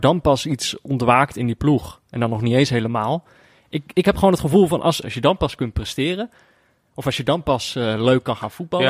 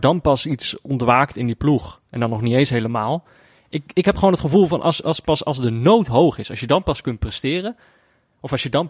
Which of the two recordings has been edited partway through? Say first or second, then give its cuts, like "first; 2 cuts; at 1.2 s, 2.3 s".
first; 1 cut; at 5.0 s